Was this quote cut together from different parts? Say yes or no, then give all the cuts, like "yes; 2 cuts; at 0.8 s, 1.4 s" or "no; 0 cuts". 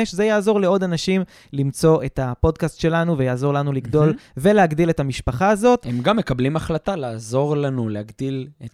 no; 0 cuts